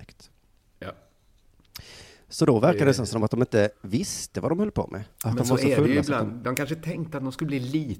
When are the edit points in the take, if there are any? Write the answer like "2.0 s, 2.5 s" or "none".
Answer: 5.1 s